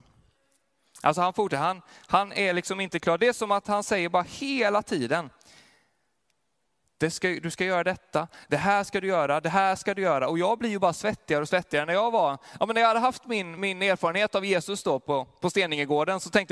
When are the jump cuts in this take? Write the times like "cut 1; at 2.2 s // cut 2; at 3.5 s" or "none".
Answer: none